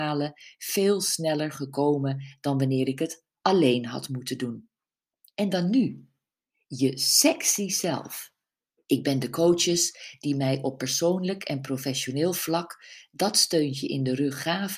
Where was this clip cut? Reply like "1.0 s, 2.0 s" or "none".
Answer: 5.2 s, 8.8 s